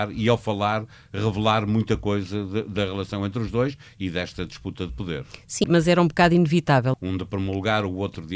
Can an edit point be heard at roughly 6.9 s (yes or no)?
yes